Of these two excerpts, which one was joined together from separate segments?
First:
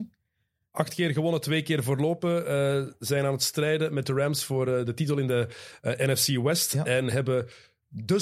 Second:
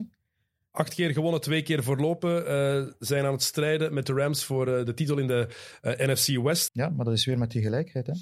second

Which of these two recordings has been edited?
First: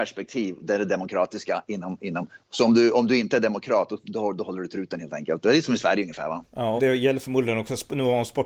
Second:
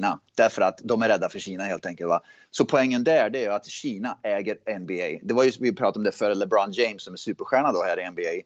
first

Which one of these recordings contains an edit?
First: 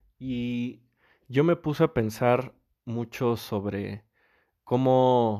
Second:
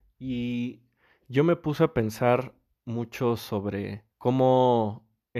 second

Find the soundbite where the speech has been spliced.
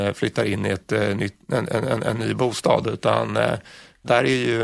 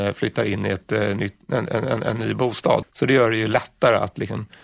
second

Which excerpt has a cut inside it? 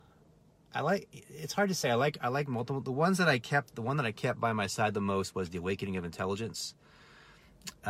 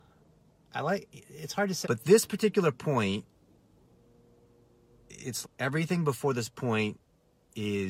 second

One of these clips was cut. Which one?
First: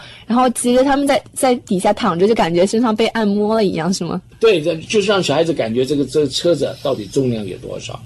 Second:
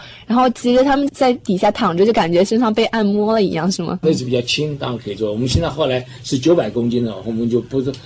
second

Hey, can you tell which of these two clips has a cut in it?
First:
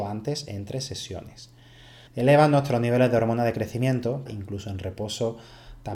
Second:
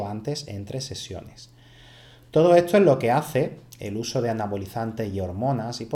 first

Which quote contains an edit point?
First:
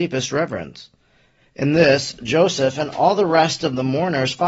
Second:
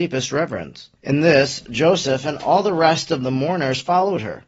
second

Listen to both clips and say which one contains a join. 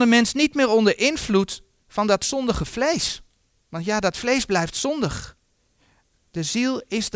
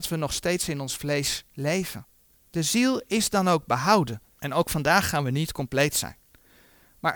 second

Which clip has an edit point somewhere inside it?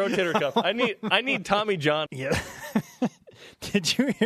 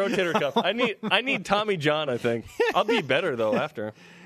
first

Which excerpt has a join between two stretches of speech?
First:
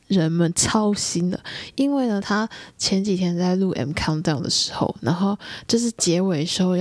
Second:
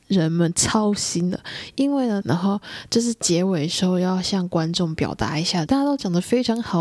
second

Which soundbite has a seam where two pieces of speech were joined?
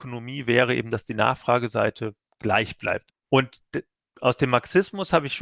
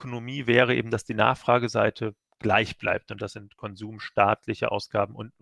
first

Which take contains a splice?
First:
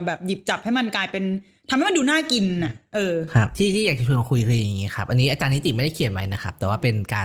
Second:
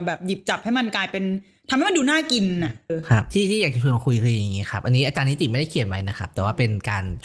second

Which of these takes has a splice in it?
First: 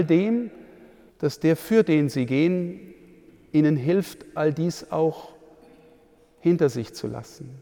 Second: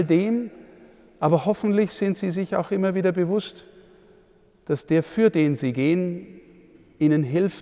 first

